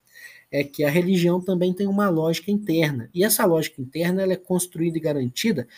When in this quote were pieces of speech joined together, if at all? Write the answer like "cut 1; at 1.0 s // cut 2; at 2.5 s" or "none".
none